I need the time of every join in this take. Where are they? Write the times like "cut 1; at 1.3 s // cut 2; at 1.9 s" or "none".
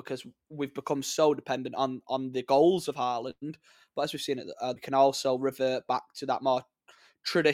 cut 1; at 4.8 s

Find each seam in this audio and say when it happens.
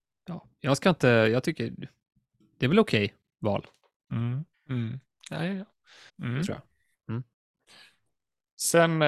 cut 1; at 4.5 s // cut 2; at 6.1 s

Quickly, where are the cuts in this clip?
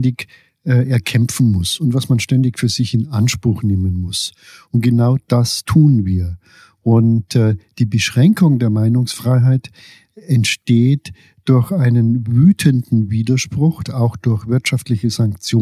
cut 1; at 13.8 s

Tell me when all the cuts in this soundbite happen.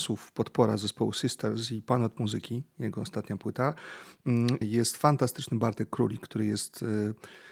cut 1; at 4.6 s

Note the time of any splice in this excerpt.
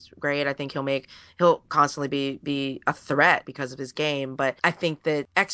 cut 1; at 3.4 s

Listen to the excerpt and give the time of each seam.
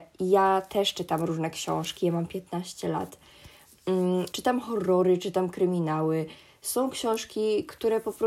cut 1; at 4.3 s

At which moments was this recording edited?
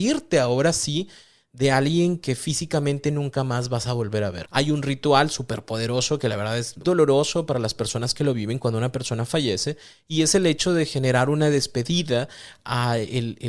cut 1; at 4.4 s // cut 2; at 6.8 s

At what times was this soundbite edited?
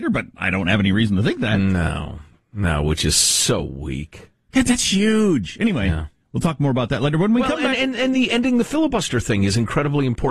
none

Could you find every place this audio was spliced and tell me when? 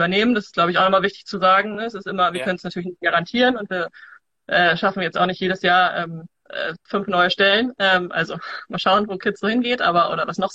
none

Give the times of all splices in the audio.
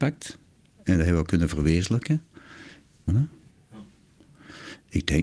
cut 1; at 3.1 s

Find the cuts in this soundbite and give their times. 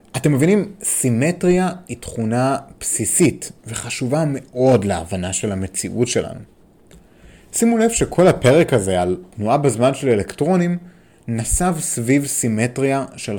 cut 1; at 3.6 s

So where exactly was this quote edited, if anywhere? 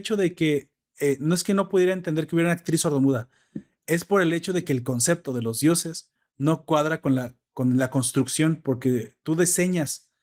none

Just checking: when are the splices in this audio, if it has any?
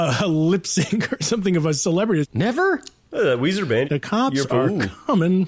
cut 1; at 2.2 s // cut 2; at 3.8 s

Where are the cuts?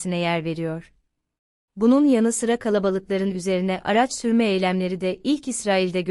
cut 1; at 1.7 s

